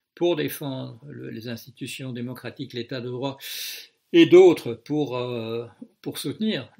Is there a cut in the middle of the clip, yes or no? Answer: yes